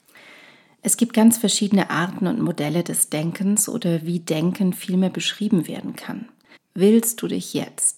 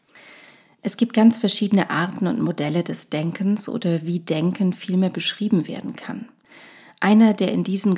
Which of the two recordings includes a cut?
first; 1 cut; at 6.6 s

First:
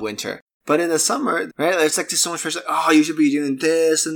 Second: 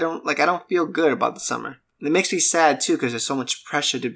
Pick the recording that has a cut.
first; 1 cut; at 1.5 s

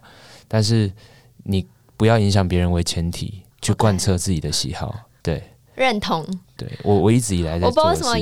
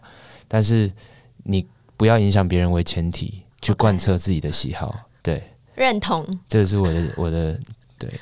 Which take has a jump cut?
first; 1 cut; at 6.4 s

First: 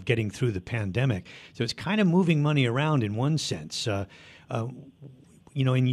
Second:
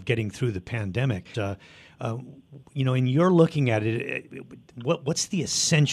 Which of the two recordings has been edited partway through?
second; 2 cuts; at 1.3 s, 2.6 s

